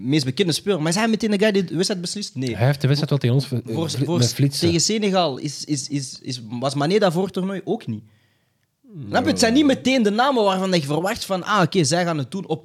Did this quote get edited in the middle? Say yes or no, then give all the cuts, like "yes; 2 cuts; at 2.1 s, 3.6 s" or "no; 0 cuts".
no; 0 cuts